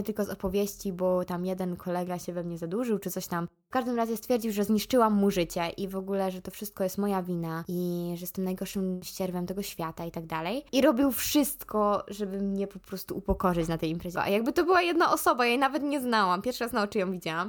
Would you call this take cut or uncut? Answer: cut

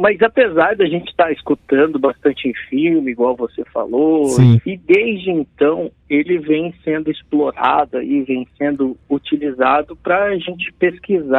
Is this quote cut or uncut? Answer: cut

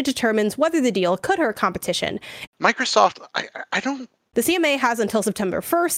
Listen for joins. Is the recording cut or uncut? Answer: cut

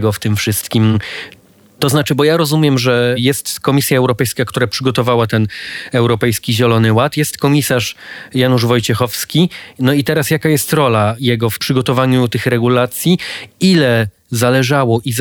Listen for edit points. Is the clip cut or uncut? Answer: uncut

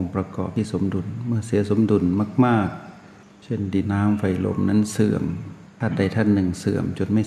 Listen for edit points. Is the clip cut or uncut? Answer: cut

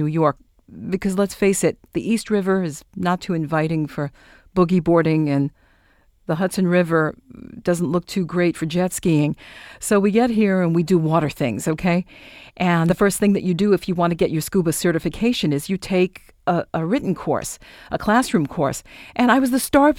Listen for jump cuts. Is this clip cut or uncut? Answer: cut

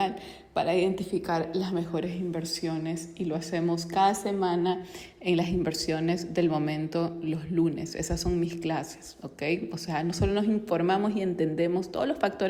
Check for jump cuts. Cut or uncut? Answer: uncut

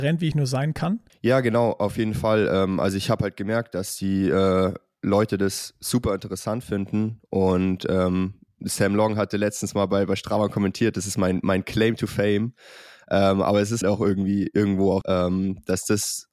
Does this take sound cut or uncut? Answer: cut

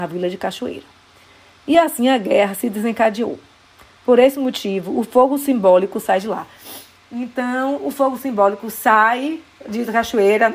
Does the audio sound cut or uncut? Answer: uncut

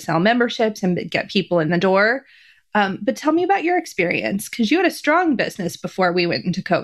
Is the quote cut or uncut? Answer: uncut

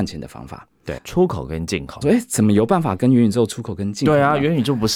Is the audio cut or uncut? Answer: cut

